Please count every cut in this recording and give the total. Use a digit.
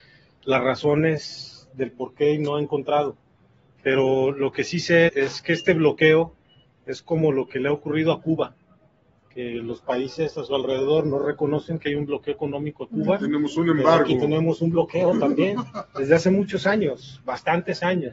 1